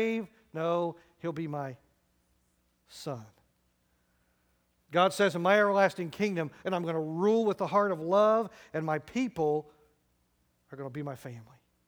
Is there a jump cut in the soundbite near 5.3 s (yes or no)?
no